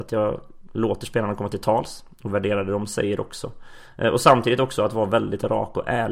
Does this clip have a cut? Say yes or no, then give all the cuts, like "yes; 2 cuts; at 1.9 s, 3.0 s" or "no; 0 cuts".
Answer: no; 0 cuts